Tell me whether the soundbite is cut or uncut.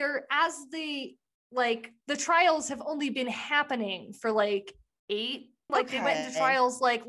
cut